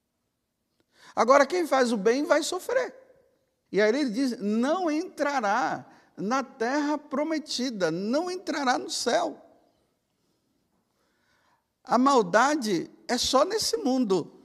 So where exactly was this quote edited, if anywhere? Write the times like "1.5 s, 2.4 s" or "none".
3.7 s